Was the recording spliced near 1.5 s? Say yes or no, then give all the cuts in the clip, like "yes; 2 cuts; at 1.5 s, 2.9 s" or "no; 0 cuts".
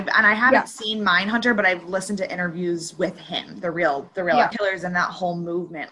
no; 1 cut; at 4.5 s